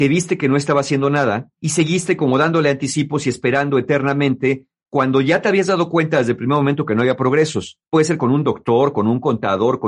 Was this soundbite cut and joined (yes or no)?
yes